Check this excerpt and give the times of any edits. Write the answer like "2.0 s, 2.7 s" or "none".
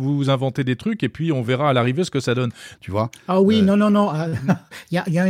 2.7 s